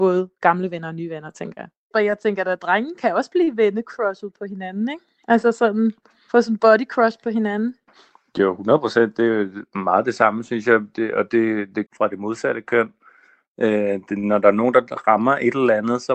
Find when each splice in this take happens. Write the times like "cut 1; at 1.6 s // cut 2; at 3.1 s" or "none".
cut 1; at 11.9 s